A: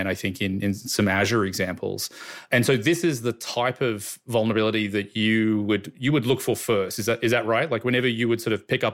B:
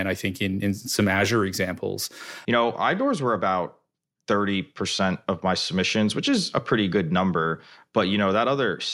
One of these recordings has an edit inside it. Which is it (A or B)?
B